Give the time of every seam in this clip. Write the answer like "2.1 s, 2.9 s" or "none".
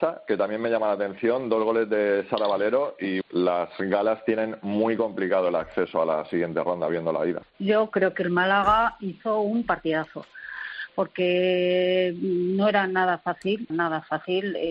3.2 s, 7.5 s, 13.7 s